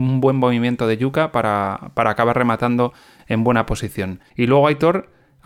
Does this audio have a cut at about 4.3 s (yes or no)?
yes